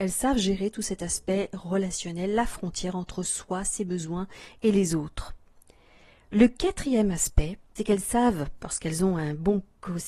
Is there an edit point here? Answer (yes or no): no